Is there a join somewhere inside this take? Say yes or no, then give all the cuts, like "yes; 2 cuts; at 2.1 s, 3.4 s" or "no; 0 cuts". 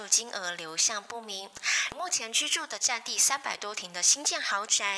yes; 1 cut; at 1.9 s